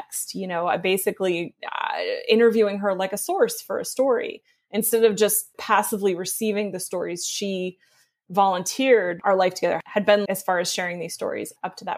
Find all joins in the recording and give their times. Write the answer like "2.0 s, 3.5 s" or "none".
9.2 s, 10.2 s